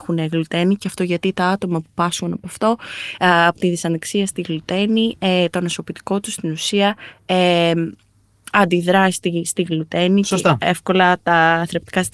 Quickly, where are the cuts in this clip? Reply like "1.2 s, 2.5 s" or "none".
10.6 s

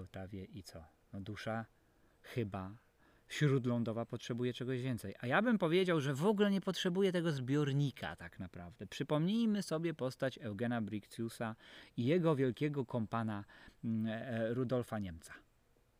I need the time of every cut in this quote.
none

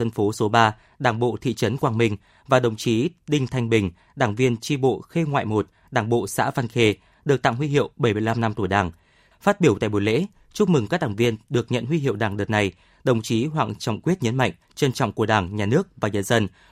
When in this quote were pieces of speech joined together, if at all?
9.3 s, 14.6 s

